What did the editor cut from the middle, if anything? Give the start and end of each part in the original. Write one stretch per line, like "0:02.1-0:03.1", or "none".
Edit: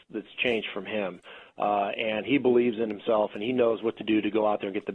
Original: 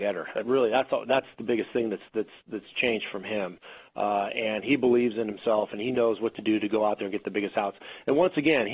none